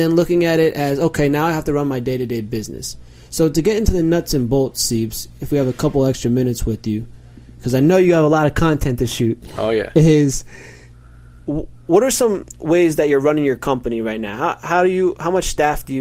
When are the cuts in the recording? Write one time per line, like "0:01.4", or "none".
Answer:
none